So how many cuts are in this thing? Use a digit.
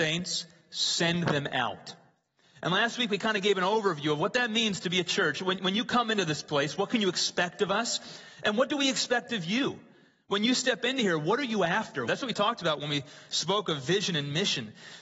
2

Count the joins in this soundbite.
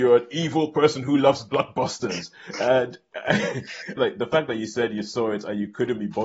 1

